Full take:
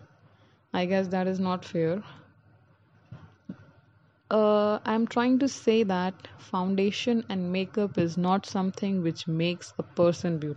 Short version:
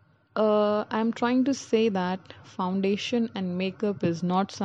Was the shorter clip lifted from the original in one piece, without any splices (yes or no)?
yes